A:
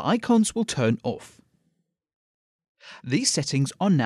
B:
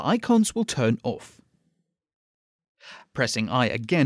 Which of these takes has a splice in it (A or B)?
A